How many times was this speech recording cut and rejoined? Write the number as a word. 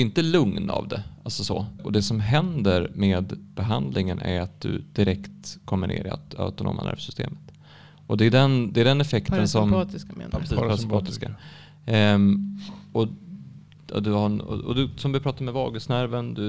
one